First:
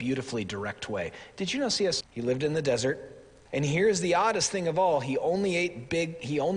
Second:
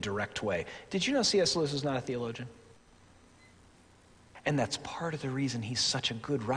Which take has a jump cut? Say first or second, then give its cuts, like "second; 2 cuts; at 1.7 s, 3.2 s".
first; 2 cuts; at 2.0 s, 3.5 s